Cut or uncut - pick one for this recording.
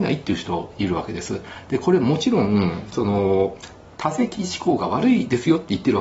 uncut